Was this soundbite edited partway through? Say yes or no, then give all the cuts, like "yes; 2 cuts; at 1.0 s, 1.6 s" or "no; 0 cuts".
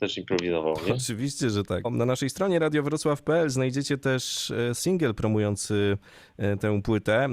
no; 0 cuts